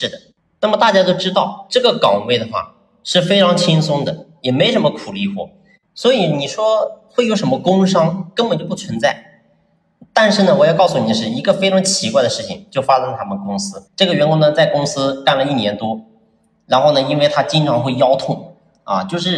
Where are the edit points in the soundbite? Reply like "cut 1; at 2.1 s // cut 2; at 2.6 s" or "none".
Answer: cut 1; at 13.9 s